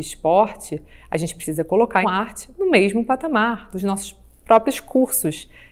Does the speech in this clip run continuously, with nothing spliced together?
no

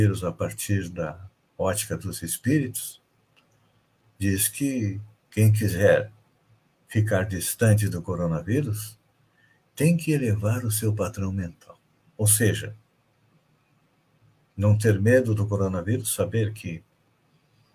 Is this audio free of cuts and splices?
yes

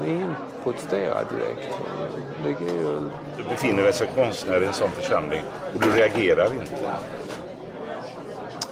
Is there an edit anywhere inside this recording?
no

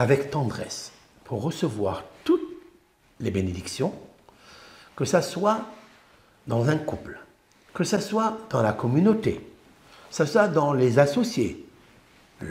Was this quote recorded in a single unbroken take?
no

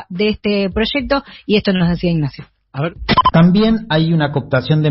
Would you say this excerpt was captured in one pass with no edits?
no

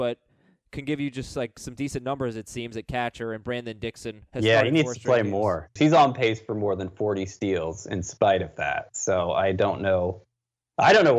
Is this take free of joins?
no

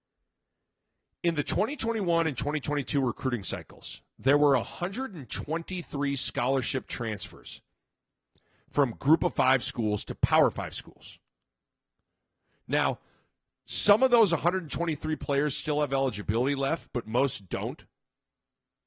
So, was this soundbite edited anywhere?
no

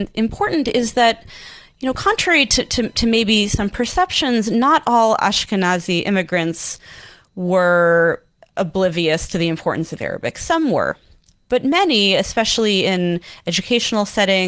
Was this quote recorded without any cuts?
yes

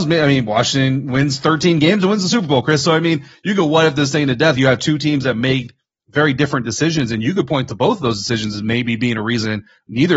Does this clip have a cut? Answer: no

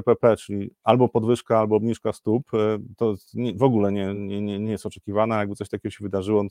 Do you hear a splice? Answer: no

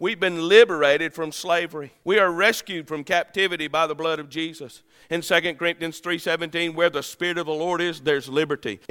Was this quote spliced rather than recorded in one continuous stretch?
no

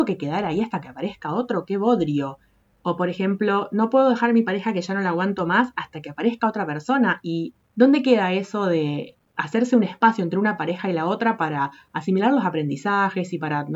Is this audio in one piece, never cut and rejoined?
yes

